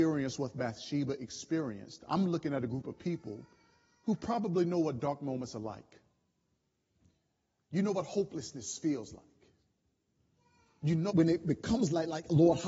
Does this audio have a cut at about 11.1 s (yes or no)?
yes